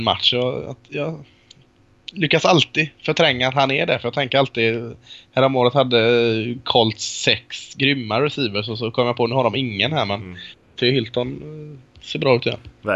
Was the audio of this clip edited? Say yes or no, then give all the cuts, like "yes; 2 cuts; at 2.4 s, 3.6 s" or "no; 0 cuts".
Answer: no; 0 cuts